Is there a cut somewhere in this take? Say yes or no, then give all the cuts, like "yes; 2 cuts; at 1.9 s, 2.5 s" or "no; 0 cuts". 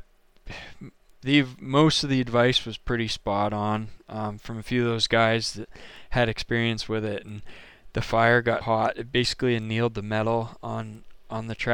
yes; 2 cuts; at 4.4 s, 8.6 s